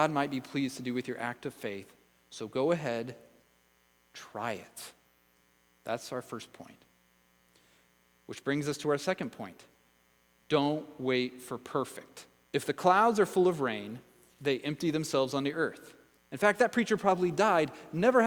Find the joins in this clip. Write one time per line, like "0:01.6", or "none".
0:12.5
0:16.2